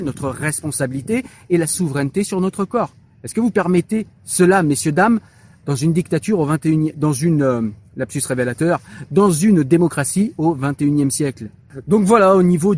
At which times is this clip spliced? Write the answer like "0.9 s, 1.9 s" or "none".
none